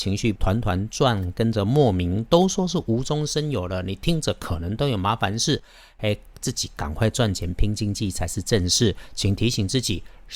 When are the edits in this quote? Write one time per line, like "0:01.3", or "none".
none